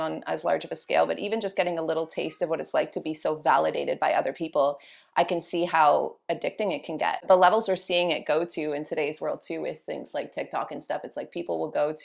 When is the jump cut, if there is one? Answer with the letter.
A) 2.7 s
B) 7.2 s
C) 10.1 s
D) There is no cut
D